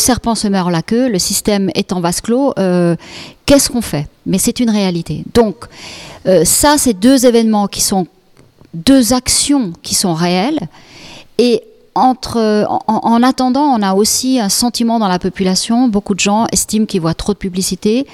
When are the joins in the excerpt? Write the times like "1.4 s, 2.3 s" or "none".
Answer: none